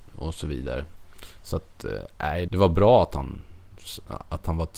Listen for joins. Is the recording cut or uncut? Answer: cut